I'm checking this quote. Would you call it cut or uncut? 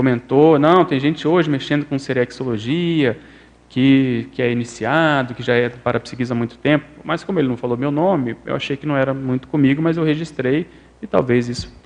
uncut